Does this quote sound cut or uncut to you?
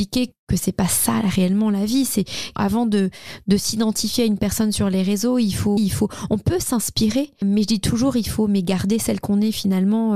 cut